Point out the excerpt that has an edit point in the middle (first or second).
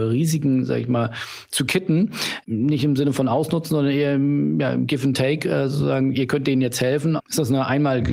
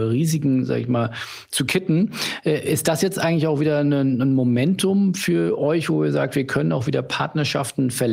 first